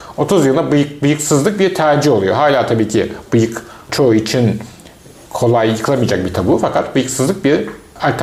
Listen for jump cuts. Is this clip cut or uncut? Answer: uncut